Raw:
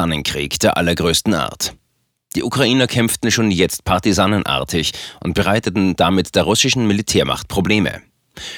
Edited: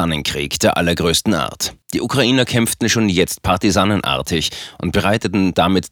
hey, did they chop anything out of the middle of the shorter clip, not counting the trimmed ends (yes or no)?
yes